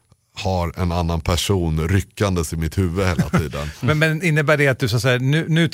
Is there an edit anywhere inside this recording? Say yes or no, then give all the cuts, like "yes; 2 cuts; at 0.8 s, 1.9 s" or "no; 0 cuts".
no; 0 cuts